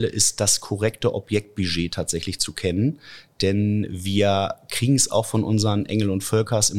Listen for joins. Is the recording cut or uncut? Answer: uncut